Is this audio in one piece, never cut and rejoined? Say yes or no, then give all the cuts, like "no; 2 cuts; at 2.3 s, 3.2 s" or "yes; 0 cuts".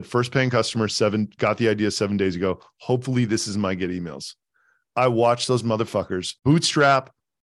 no; 1 cut; at 6.4 s